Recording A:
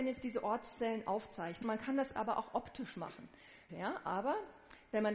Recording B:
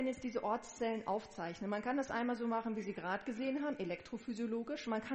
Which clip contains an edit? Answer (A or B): A